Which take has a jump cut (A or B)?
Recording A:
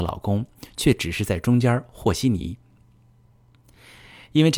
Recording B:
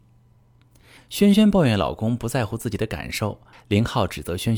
B